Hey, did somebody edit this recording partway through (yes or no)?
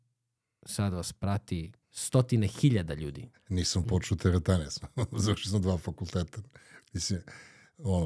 yes